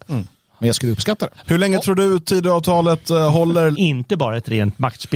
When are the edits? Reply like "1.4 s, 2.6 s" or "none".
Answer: 1.4 s, 3.7 s